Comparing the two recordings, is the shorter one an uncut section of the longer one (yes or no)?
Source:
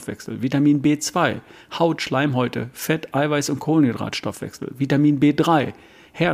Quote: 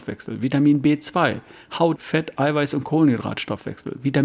no